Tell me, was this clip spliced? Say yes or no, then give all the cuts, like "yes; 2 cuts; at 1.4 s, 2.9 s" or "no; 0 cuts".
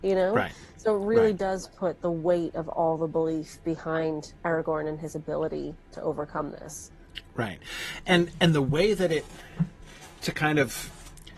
no; 0 cuts